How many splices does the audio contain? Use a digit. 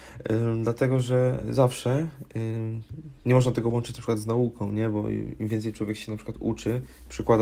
0